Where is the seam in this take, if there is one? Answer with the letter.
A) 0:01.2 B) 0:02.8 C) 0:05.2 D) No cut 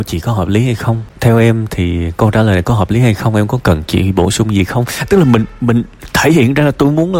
A